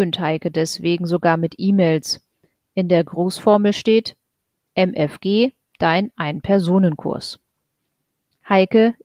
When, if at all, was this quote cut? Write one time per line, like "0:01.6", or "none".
none